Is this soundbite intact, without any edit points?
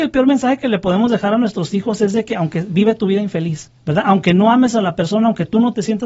no; 1 cut; at 3.8 s

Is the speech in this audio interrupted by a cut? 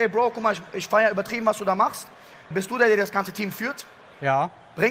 yes; 1 cut; at 2.5 s

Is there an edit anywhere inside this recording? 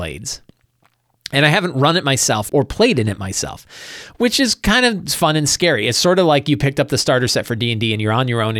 yes; 1 cut; at 2.5 s

